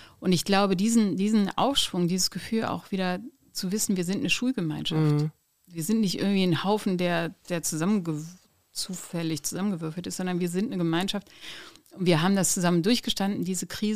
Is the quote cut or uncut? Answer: cut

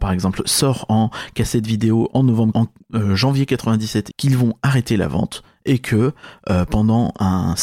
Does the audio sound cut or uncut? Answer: cut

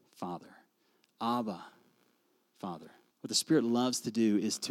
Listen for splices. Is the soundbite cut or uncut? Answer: cut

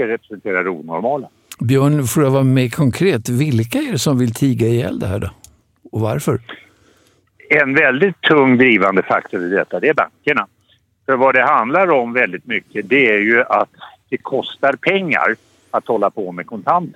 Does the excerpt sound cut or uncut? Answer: uncut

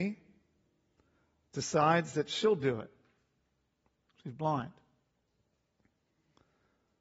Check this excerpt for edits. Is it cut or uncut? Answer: uncut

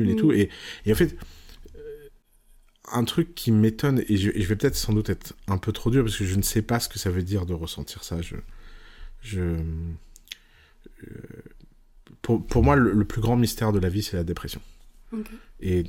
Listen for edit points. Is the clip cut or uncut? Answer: uncut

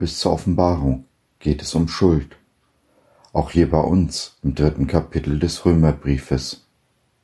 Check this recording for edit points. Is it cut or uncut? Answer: uncut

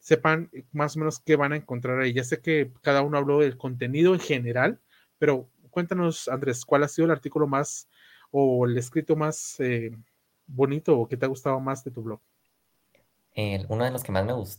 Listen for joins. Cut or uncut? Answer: uncut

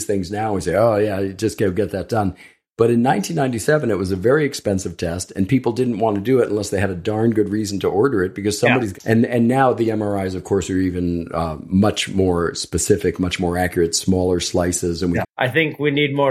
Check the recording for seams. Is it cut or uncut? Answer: cut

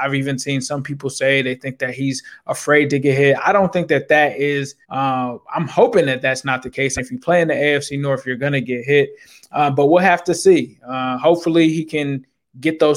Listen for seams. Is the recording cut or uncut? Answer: cut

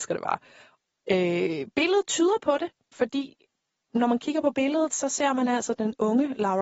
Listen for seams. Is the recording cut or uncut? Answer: cut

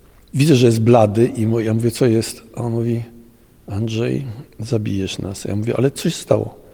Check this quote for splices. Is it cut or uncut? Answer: uncut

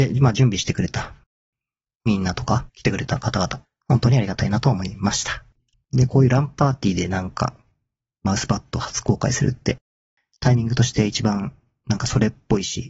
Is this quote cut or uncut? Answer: cut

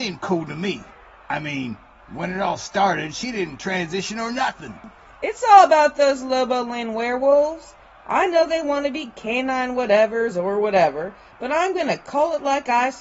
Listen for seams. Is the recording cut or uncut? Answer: uncut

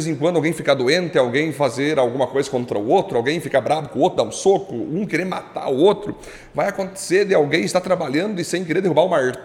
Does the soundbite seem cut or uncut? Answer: uncut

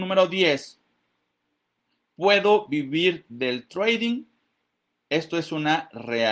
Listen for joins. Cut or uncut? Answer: uncut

